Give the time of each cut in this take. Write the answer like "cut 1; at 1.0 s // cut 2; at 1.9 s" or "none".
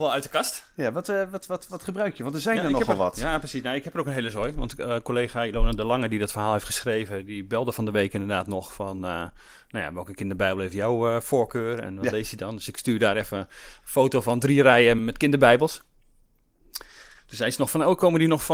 cut 1; at 15.0 s